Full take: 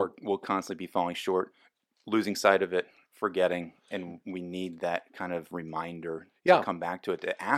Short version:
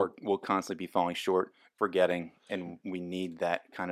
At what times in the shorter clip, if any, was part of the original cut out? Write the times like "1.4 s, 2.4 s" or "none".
1.8 s

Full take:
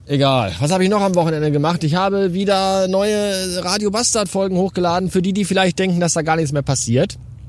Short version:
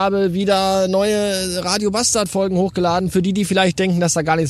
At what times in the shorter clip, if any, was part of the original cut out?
none

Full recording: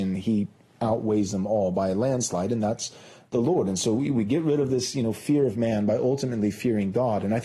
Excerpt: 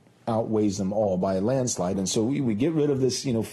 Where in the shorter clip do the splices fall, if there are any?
1.9 s

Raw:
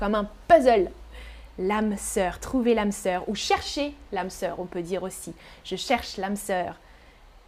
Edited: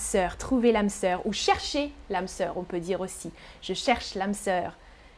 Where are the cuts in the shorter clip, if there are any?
none

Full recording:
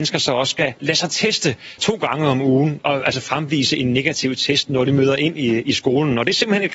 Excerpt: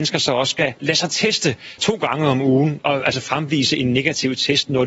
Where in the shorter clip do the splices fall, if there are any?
none

